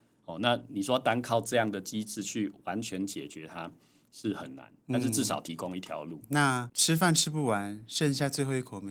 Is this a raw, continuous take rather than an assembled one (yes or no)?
no